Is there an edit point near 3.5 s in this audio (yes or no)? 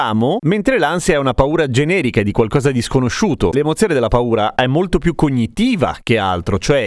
yes